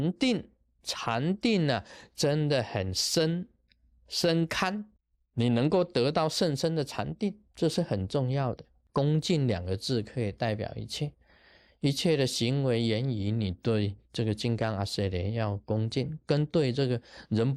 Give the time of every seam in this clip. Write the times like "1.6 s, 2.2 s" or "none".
7.5 s, 8.9 s